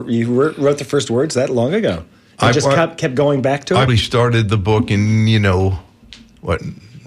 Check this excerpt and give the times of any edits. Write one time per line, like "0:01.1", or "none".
0:03.9